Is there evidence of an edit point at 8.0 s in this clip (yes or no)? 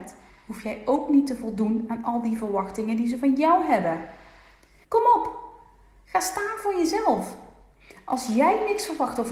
no